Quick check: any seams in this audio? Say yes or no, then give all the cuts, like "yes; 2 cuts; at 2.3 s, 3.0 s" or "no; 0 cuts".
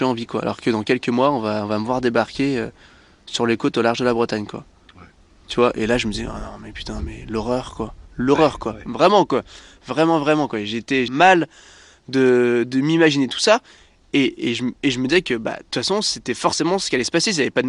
yes; 1 cut; at 11.1 s